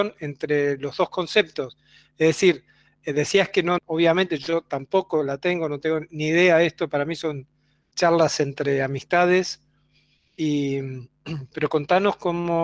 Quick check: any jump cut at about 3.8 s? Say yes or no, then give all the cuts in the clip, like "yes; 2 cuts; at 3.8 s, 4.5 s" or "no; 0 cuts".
yes; 1 cut; at 3.8 s